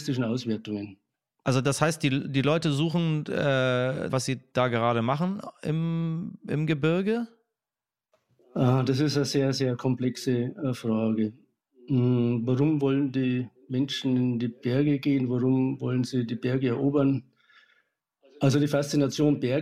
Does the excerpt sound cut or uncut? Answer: cut